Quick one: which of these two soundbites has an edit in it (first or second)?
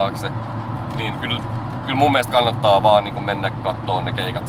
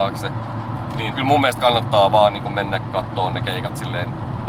second